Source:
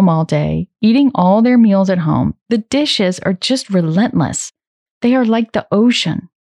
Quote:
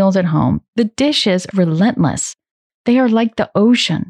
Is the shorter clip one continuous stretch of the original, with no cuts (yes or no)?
no